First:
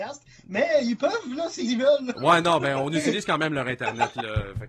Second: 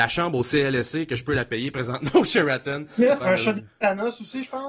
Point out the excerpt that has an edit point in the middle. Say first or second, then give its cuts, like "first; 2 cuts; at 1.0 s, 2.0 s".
second; 1 cut; at 3.2 s